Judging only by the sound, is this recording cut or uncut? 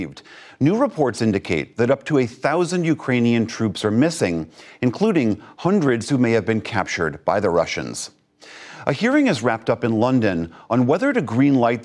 uncut